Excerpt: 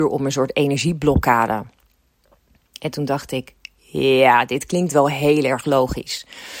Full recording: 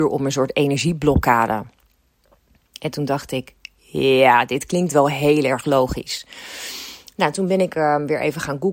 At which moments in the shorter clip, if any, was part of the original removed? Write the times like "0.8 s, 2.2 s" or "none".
none